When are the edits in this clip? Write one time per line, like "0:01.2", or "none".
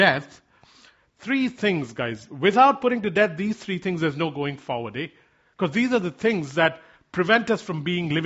none